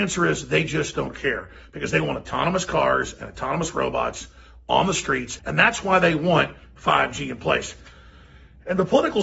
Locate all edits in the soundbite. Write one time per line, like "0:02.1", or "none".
0:05.4

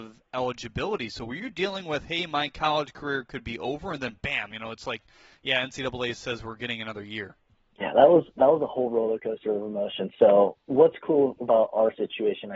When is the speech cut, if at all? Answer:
none

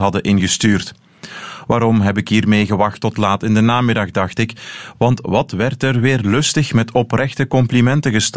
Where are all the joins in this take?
none

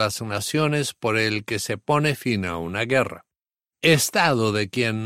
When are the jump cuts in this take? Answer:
0:03.7

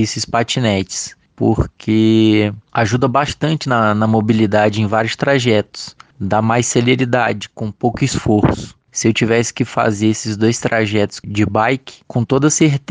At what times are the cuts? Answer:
none

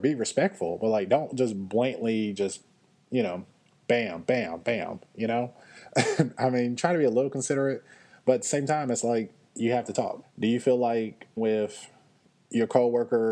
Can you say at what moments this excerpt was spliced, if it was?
0:10.2
0:11.4

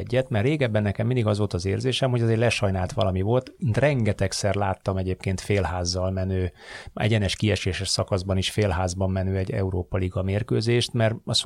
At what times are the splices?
none

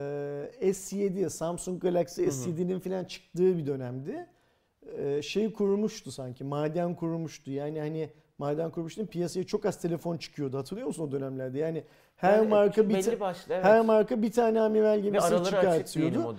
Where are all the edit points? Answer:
none

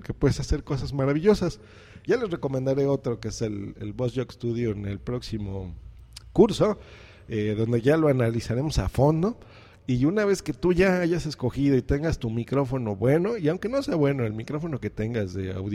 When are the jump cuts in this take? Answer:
0:02.1

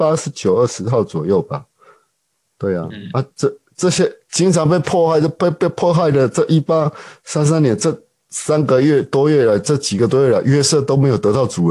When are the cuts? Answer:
none

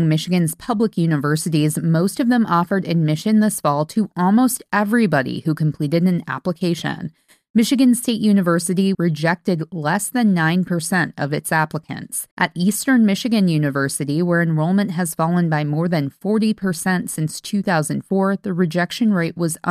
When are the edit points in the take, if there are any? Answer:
0:08.9
0:12.3

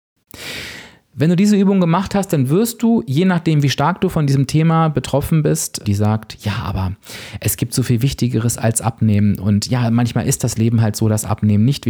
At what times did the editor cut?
0:05.8

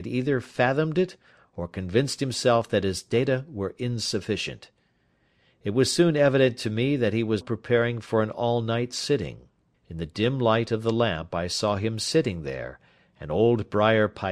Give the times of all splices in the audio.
0:07.4
0:09.7

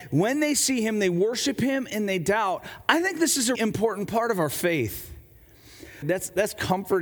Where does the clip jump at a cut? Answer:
0:03.5
0:06.0

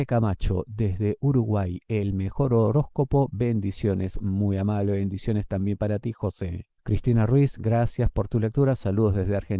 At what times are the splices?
none

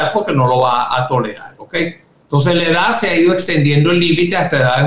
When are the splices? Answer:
none

